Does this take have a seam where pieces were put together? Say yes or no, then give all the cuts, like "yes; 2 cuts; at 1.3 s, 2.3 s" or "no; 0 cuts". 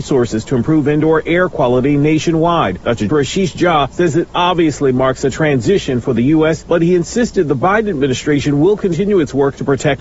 yes; 1 cut; at 3.1 s